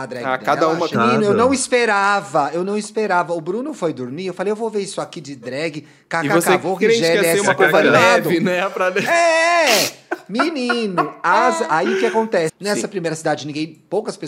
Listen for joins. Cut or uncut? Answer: cut